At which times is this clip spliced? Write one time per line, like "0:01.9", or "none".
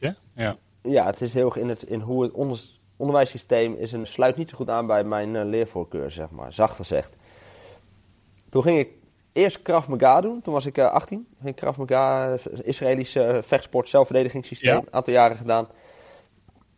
0:04.0